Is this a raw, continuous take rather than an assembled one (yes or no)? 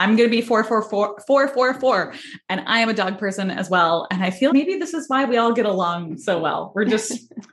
no